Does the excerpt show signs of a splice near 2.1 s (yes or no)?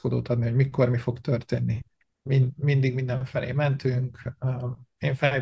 yes